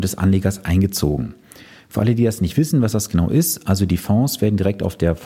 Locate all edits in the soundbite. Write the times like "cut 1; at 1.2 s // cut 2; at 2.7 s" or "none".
none